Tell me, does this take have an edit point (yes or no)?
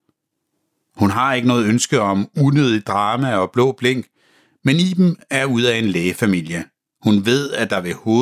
no